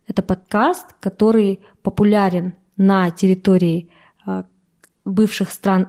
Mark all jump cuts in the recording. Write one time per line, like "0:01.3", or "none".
none